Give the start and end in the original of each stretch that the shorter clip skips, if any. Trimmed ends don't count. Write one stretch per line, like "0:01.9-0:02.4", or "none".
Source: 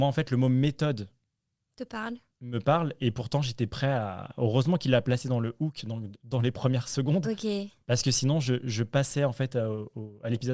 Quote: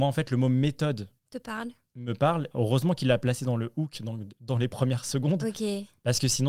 0:01.2-0:01.6
0:03.0-0:04.3